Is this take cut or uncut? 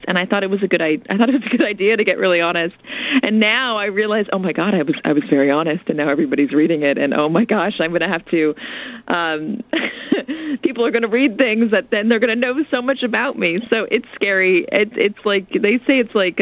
uncut